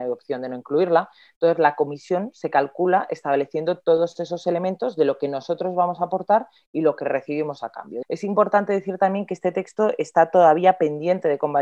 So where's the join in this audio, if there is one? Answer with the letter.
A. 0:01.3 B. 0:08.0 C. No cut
B